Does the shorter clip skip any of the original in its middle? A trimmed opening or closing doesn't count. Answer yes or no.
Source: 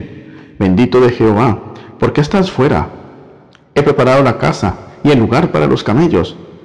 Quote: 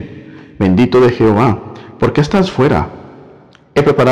no